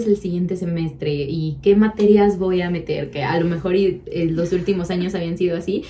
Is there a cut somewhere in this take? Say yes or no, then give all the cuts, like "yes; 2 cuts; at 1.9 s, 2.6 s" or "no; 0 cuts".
no; 0 cuts